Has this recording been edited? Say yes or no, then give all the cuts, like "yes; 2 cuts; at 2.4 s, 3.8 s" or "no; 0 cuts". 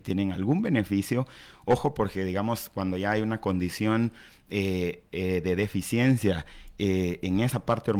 no; 0 cuts